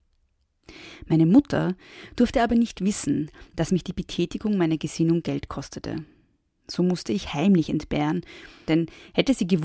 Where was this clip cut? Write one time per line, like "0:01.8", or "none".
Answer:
0:08.7